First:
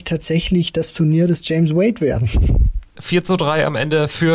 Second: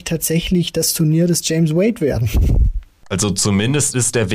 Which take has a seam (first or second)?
first